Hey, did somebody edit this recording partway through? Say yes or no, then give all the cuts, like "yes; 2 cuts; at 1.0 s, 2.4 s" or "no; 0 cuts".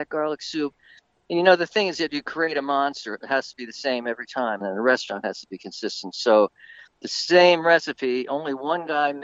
yes; 1 cut; at 4.6 s